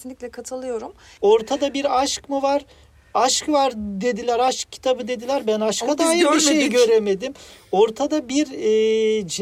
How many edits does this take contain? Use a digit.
1